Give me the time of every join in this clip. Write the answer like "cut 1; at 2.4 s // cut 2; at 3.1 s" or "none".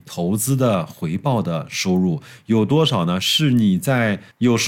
none